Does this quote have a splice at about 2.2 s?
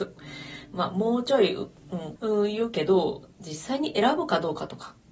yes; 1 cut; at 2.2 s

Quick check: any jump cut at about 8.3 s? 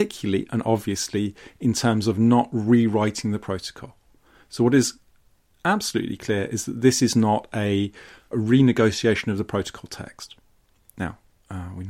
yes; 1 cut; at 8.3 s

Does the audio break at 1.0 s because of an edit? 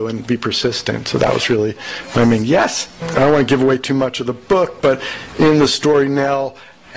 no; 1 cut; at 3.0 s

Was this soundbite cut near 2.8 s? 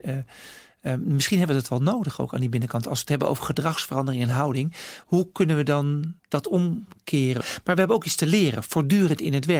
no; 2 cuts; at 6.2 s, 7.4 s

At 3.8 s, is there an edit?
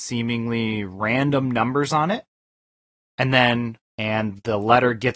yes; 1 cut; at 3.8 s

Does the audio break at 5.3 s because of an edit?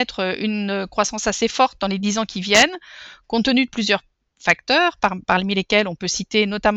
no; 0 cuts

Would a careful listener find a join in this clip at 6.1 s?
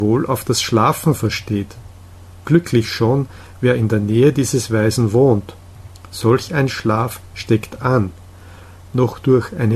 no; 0 cuts

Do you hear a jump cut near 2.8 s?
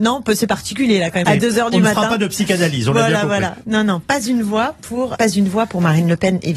no; 2 cuts; at 1.2 s, 5.1 s

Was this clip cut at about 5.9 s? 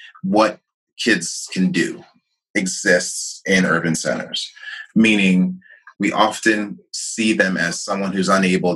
yes; 1 cut; at 5.9 s

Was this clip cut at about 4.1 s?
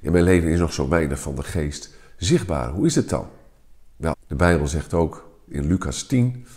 yes; 1 cut; at 4.1 s

